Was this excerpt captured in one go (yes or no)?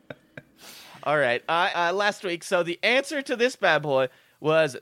no